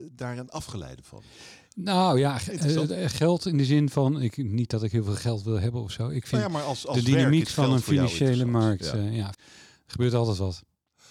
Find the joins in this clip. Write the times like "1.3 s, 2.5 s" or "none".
9.3 s